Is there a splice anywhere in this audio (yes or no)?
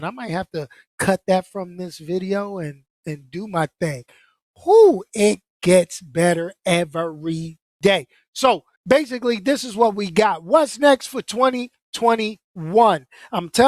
yes